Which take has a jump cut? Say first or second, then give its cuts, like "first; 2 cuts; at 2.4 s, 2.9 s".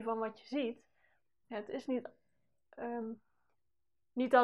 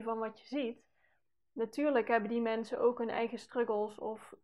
first; 1 cut; at 1.4 s